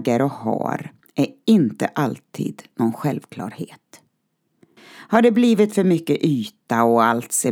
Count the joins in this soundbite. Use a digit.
1